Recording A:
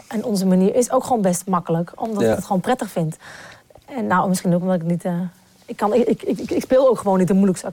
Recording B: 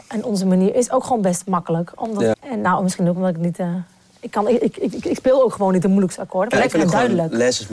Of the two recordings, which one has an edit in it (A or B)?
B